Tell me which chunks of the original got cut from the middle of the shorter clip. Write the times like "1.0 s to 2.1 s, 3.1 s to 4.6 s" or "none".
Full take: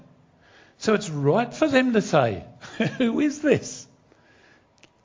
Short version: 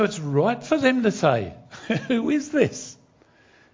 none